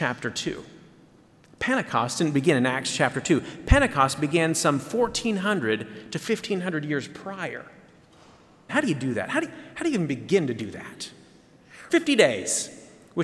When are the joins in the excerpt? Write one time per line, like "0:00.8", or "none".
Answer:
0:08.7
0:11.9